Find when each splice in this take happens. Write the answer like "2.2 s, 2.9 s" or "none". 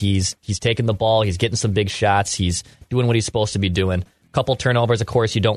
none

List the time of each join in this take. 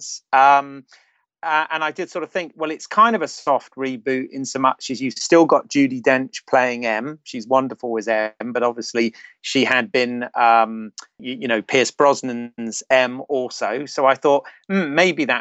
11.2 s

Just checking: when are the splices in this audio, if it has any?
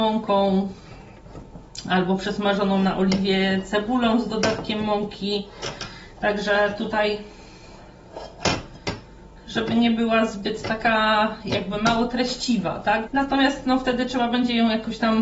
9.4 s, 13.1 s

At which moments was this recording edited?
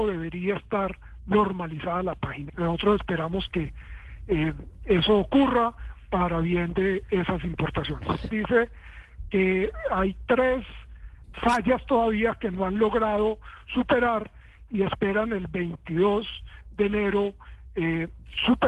2.5 s, 8.3 s, 11.2 s

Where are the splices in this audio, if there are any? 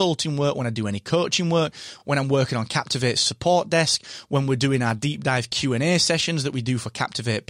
none

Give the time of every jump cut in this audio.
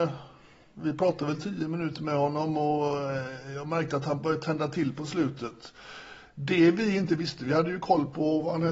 none

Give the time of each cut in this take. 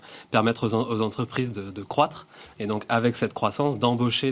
none

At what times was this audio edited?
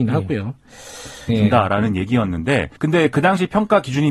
1.3 s, 2.8 s

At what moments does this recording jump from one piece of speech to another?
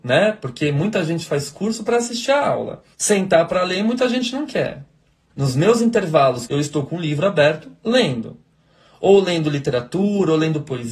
2.9 s, 5.3 s, 6.5 s

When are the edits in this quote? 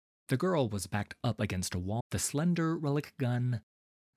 2.0 s

